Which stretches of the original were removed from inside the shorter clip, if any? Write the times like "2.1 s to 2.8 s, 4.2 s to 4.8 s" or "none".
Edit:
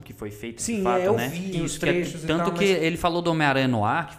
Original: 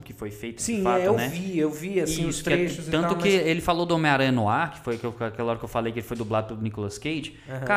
1.5 s to 2.2 s